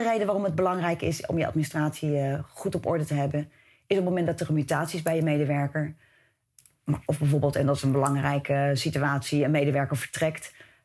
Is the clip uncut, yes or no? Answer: yes